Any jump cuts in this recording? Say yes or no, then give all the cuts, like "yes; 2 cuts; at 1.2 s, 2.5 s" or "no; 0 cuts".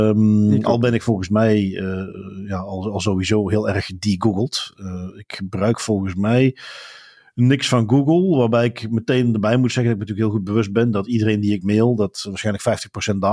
no; 0 cuts